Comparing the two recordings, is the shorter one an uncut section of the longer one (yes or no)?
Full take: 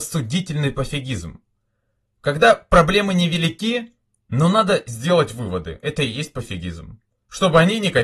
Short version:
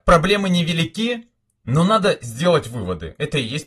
yes